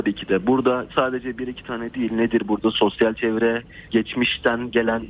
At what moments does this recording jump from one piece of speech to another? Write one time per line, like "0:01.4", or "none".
0:03.9

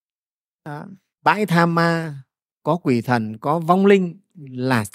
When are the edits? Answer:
0:01.1

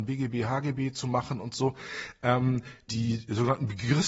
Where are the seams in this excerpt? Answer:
0:02.9

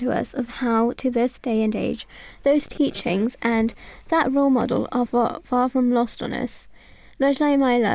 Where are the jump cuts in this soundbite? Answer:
none

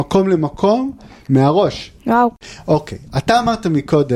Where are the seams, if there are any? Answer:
0:02.0

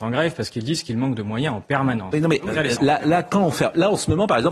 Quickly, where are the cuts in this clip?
0:02.8

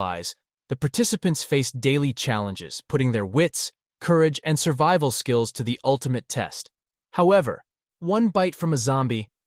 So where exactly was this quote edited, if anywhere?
none

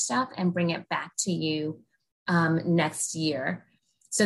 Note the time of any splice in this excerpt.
none

